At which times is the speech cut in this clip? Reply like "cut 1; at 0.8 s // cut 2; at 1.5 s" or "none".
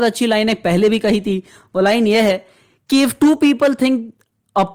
none